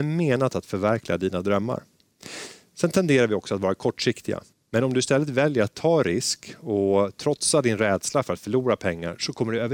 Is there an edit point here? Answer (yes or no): yes